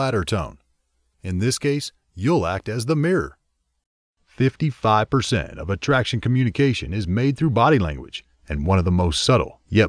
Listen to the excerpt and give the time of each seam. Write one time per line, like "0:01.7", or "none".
0:01.1